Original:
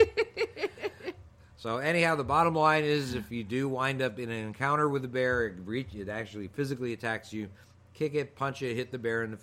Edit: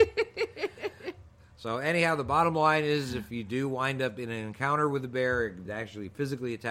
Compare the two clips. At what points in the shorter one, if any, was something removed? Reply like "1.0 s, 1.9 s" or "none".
5.7 s